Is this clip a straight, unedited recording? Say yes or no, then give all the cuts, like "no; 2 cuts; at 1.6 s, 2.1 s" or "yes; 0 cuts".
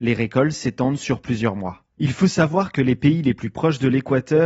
yes; 0 cuts